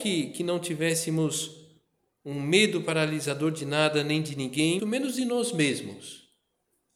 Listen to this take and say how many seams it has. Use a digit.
1